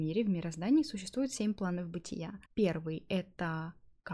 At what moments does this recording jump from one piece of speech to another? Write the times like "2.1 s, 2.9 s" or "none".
2.5 s